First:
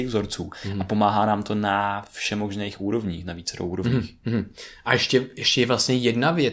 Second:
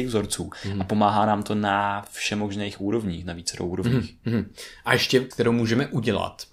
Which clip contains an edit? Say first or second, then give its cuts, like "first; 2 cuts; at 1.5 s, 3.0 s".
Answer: second; 1 cut; at 5.3 s